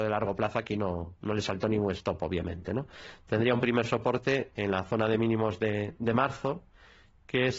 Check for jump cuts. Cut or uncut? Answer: uncut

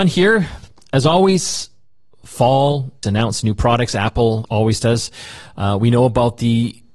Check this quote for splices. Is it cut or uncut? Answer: cut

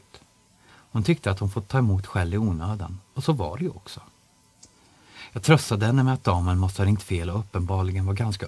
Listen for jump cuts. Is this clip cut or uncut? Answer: uncut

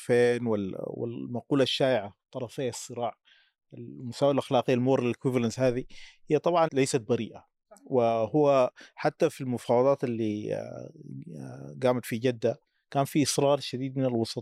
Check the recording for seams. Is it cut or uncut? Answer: cut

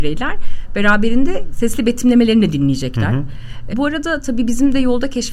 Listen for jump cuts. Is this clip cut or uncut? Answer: cut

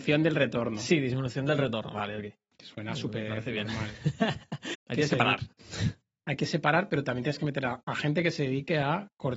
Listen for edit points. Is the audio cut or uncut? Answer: cut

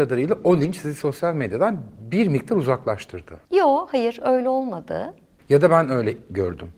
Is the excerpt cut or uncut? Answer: cut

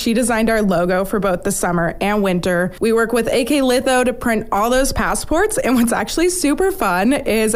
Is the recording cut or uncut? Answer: uncut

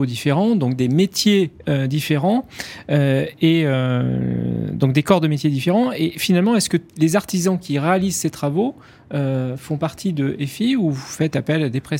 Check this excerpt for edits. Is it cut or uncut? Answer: uncut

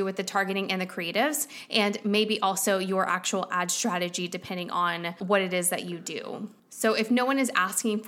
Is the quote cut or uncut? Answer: uncut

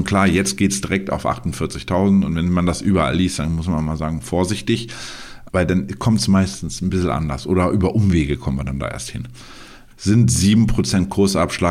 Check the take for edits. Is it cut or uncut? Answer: cut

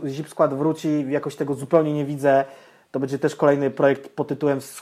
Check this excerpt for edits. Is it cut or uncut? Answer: uncut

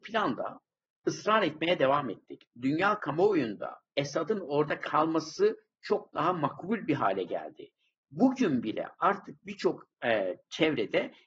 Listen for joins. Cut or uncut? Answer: cut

